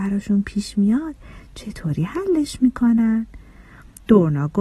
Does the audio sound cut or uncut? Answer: uncut